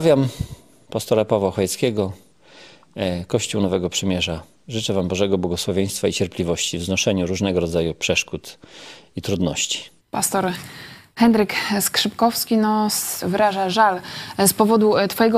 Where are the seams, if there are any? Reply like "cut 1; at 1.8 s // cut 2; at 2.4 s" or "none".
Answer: cut 1; at 10.0 s // cut 2; at 13.2 s